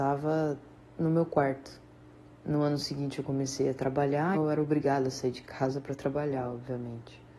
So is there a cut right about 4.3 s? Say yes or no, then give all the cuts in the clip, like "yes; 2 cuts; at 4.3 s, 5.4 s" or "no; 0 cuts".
yes; 1 cut; at 4.3 s